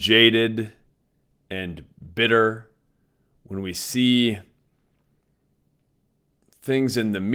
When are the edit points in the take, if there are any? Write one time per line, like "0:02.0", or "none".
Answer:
none